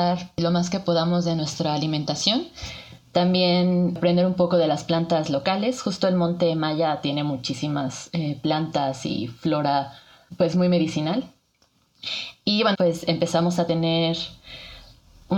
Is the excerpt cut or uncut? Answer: cut